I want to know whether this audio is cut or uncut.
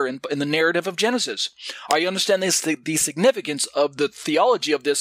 uncut